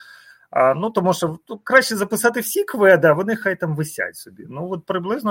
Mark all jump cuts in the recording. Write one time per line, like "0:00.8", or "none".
none